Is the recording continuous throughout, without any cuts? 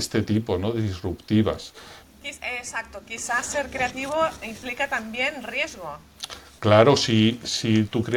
no; 1 cut; at 2.0 s

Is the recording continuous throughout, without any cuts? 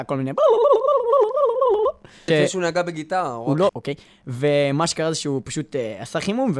no; 2 cuts; at 2.3 s, 3.7 s

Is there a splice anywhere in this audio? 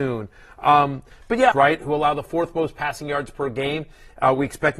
yes; 1 cut; at 1.5 s

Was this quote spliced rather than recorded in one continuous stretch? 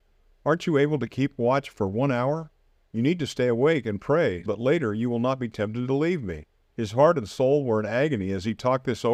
yes; 2 cuts; at 4.5 s, 6.7 s

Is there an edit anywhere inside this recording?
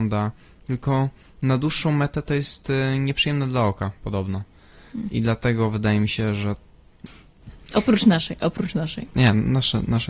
yes; 1 cut; at 7.1 s

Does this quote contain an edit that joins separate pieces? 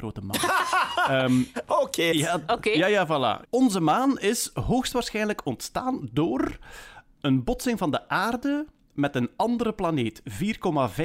yes; 2 cuts; at 2.1 s, 3.5 s

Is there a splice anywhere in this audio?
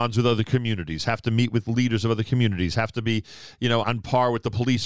yes; 1 cut; at 3.8 s

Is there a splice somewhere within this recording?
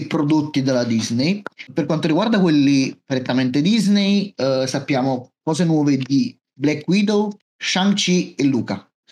yes; 1 cut; at 7.4 s

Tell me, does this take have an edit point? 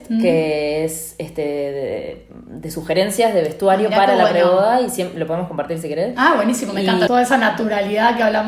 yes; 1 cut; at 7.1 s

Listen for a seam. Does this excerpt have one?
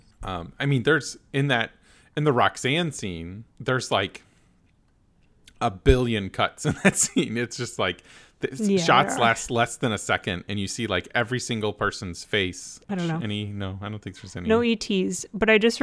yes; 2 cuts; at 3.5 s, 12.9 s

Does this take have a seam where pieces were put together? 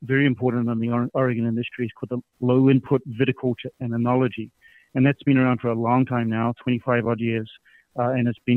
yes; 1 cut; at 2.3 s

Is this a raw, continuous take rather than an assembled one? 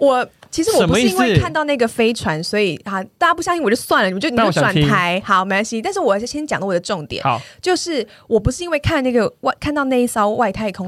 yes; 0 cuts

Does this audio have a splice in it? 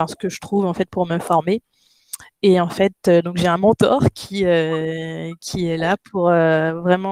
no; 0 cuts

